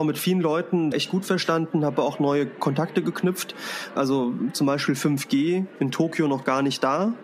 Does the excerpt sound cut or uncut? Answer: cut